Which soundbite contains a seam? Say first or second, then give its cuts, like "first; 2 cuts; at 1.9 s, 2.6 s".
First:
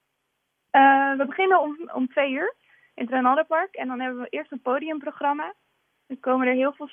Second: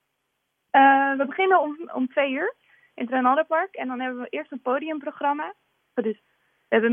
second; 1 cut; at 6.0 s